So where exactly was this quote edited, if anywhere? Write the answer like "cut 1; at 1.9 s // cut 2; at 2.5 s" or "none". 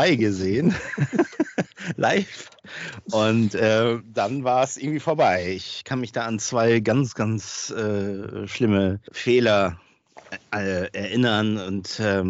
cut 1; at 9.1 s